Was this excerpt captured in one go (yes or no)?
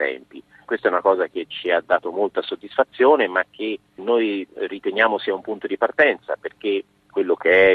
yes